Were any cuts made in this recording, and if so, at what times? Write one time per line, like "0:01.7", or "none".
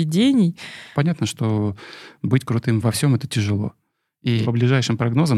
0:00.9
0:04.4